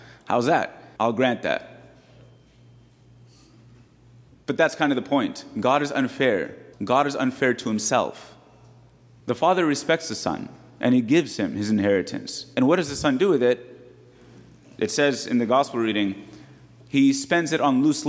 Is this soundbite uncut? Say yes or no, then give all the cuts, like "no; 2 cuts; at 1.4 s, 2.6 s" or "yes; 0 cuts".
no; 3 cuts; at 1.0 s, 6.7 s, 9.2 s